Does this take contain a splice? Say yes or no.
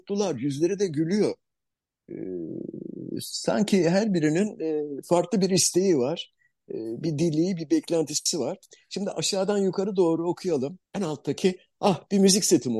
yes